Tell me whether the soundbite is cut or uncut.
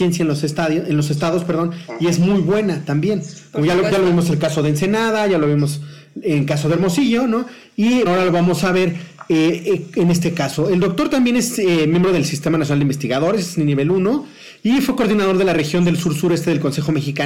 cut